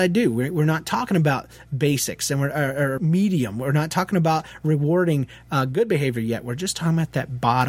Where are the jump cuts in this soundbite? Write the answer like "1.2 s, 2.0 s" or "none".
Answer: 3.0 s